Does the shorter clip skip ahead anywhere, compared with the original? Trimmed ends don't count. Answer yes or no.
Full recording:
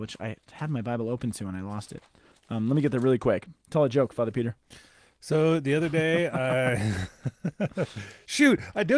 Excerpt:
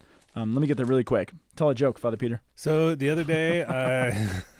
yes